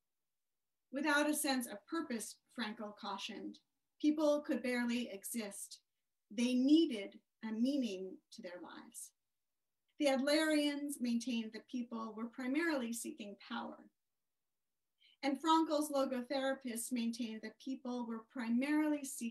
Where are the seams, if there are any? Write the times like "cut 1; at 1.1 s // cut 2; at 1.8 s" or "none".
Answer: cut 1; at 9.9 s